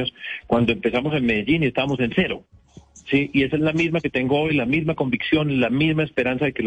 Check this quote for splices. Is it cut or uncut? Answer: uncut